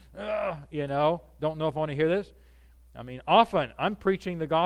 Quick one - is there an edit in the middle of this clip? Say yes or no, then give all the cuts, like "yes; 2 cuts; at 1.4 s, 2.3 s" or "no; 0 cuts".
no; 0 cuts